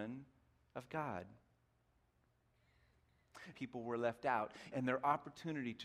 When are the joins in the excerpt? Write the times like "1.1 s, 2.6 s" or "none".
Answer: 3.5 s, 4.7 s

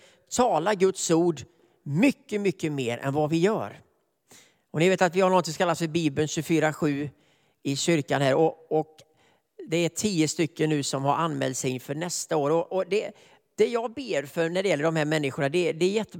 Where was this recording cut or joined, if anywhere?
none

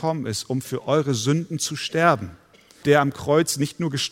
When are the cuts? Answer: 2.8 s

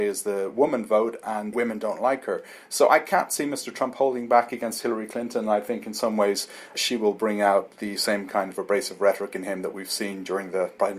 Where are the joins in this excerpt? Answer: 1.5 s

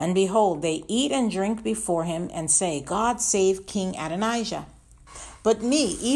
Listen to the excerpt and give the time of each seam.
none

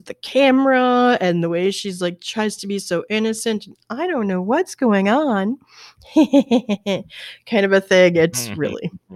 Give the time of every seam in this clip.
none

